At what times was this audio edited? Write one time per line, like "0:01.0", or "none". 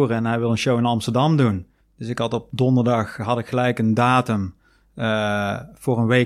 0:01.8